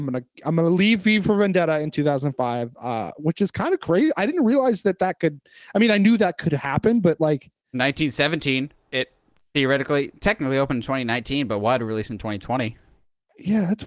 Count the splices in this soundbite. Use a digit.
0